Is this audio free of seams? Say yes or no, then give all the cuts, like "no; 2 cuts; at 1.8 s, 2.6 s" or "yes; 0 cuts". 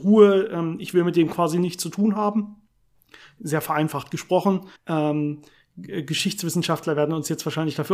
no; 1 cut; at 4.8 s